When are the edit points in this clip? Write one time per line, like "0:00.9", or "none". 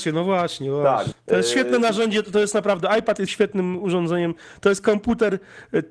0:01.1
0:03.3